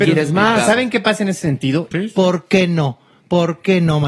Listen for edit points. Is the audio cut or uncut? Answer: cut